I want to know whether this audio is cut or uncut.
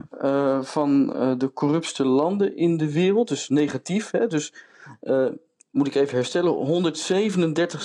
uncut